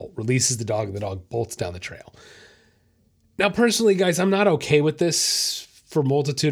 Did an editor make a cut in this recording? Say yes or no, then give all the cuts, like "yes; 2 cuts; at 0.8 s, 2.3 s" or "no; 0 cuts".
no; 0 cuts